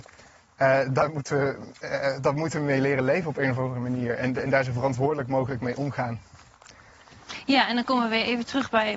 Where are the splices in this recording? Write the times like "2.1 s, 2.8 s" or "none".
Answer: none